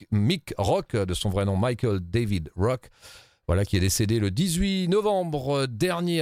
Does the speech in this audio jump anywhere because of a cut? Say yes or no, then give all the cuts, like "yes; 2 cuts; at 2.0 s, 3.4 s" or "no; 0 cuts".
no; 0 cuts